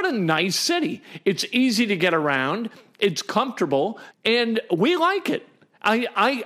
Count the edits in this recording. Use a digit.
1